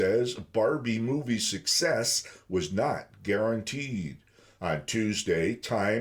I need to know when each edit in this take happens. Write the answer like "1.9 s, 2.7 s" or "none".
4.6 s